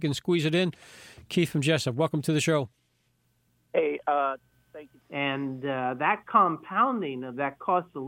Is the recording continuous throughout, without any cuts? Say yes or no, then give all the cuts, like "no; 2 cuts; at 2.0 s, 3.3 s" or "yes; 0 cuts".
no; 1 cut; at 5.0 s